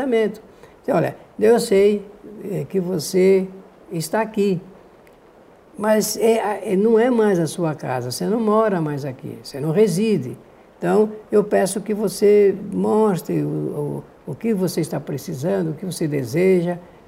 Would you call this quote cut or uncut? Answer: uncut